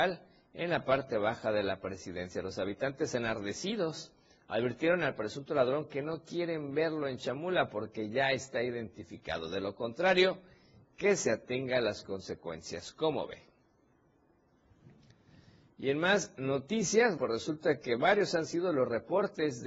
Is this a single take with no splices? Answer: no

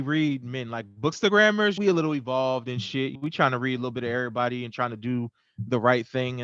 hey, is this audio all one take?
yes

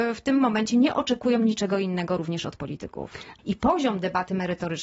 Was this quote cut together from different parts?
yes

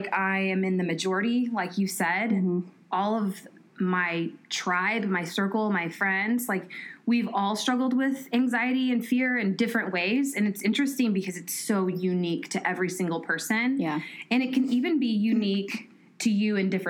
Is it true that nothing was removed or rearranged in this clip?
yes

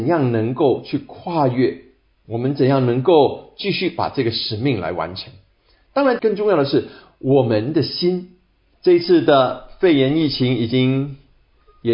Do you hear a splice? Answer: yes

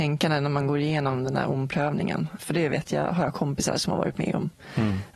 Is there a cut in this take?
yes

